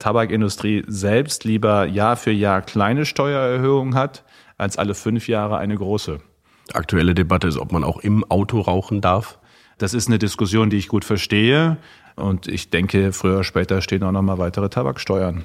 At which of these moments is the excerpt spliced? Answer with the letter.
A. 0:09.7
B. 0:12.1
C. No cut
B